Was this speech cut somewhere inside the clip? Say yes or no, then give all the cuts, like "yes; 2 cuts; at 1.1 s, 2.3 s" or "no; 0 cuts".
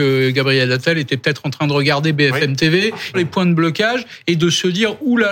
yes; 1 cut; at 3.1 s